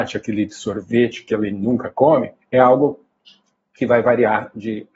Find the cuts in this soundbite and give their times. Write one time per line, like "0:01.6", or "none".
0:02.4

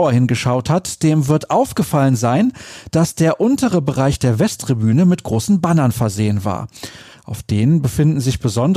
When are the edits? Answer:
none

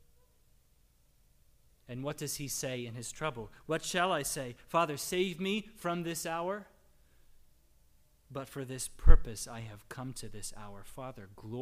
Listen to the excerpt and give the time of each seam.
0:01.8

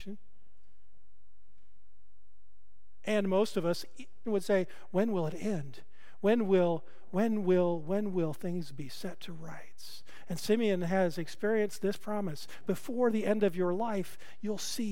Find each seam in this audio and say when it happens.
0:04.2

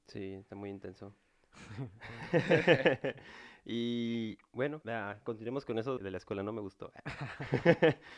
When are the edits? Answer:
0:04.8
0:06.0

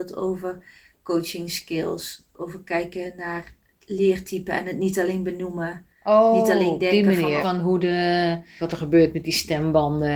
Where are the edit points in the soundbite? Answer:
0:07.4
0:08.6

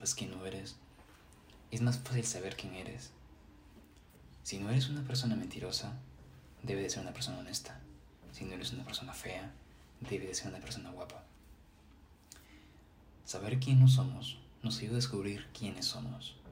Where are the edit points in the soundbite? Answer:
none

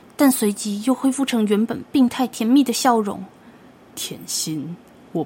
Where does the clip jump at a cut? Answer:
none

